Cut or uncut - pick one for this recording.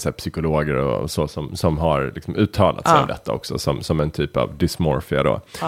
uncut